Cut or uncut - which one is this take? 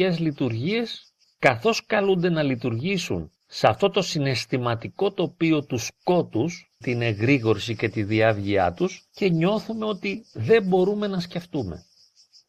cut